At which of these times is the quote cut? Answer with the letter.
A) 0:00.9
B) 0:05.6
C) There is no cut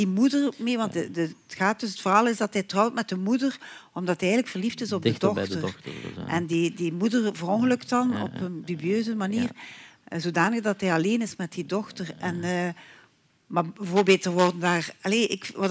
A